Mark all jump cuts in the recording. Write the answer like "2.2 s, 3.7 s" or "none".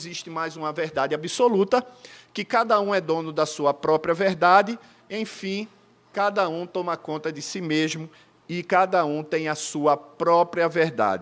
none

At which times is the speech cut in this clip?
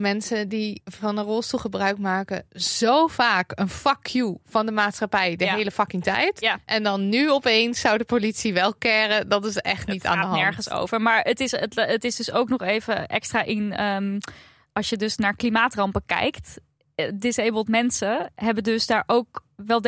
none

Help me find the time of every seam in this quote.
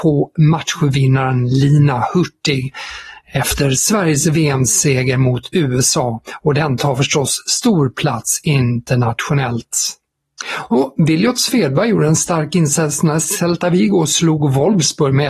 10.7 s

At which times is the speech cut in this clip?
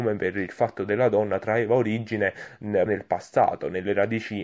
2.9 s

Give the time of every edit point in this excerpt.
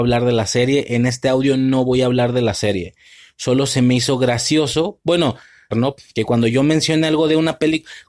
5.7 s

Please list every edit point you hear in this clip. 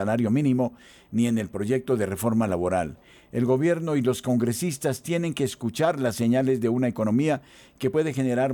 none

